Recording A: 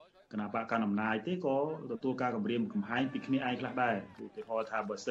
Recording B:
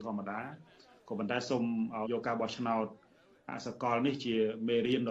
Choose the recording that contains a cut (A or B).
B